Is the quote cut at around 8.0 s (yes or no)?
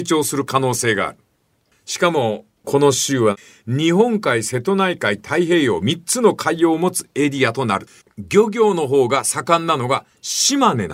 yes